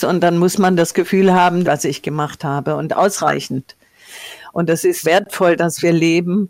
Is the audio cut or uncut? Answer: cut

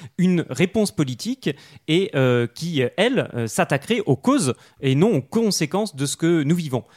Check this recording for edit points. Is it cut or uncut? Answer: uncut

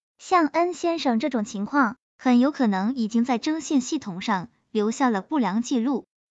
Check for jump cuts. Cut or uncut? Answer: uncut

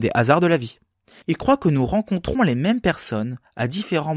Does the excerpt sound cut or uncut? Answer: cut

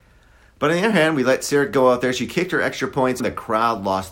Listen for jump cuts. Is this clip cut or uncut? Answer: cut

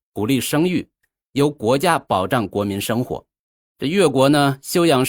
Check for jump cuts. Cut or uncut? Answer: uncut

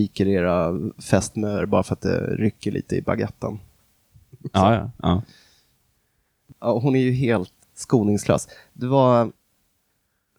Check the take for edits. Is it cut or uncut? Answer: cut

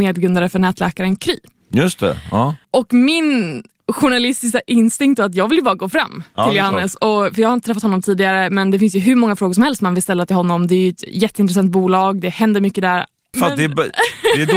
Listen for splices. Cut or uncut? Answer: cut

